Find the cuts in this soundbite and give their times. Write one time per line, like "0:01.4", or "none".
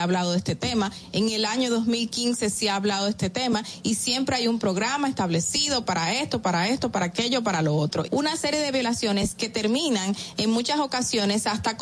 0:08.0